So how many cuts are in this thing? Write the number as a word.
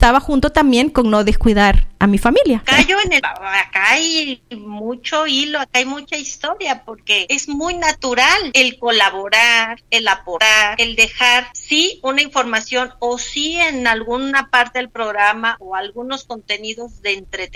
one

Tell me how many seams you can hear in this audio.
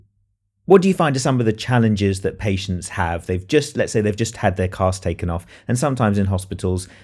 zero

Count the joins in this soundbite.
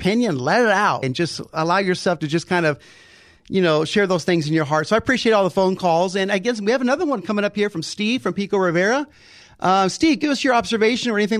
one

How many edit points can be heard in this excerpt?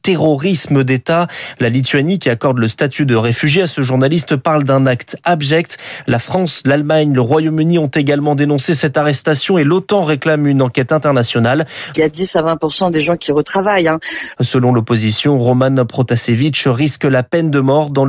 two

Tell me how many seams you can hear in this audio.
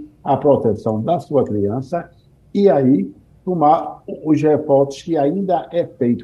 zero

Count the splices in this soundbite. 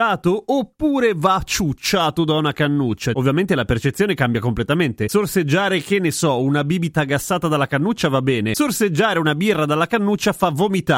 one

